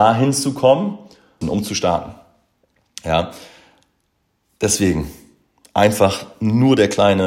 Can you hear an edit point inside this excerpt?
yes; 1 cut; at 1.4 s

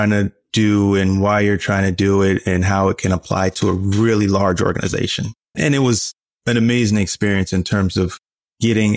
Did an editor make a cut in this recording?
yes; 1 cut; at 5.5 s

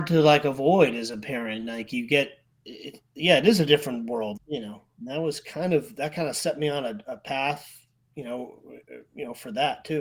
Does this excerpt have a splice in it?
yes; 2 cuts; at 2.5 s, 4.4 s

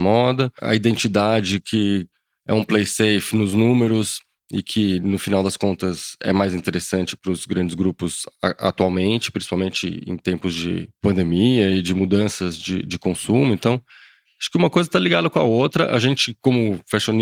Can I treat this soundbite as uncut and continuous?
yes; 0 cuts

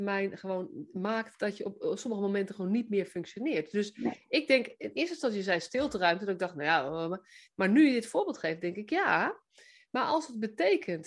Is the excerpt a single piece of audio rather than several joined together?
yes; 0 cuts

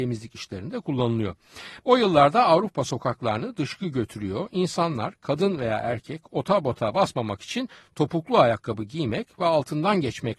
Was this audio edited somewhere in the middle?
yes; 1 cut; at 1.8 s

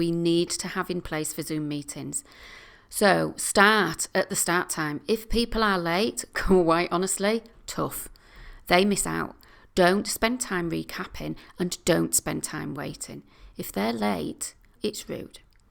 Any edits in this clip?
yes; 1 cut; at 14.8 s

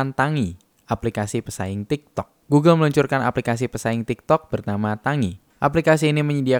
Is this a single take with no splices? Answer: yes; 0 cuts

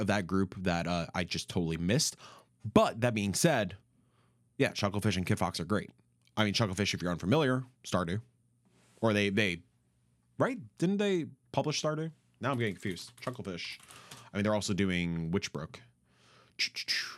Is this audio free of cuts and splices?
no; 1 cut; at 7.7 s

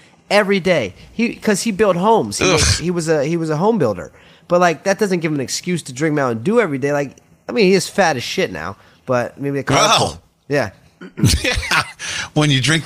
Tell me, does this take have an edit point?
no; 0 cuts

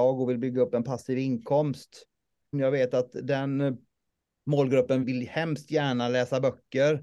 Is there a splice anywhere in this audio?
yes; 2 cuts; at 2.5 s, 5.0 s

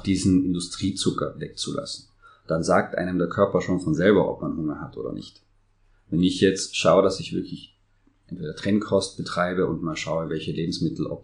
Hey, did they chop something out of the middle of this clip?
no; 0 cuts

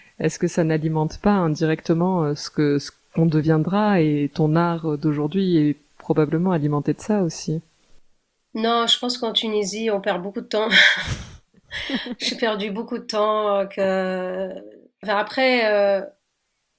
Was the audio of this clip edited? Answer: no; 0 cuts

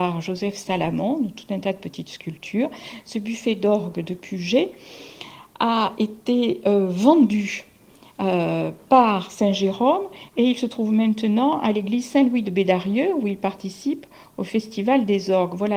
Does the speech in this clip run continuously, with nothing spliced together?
yes; 0 cuts

